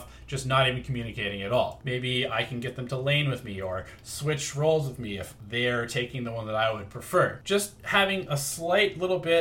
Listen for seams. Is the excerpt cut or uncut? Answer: cut